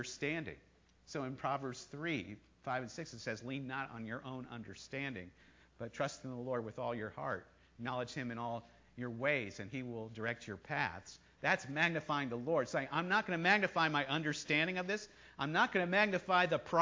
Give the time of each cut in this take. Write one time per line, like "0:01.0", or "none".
none